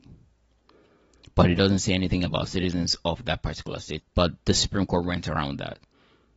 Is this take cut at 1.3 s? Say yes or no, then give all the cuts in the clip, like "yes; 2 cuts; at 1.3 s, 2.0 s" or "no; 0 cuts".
no; 1 cut; at 4.0 s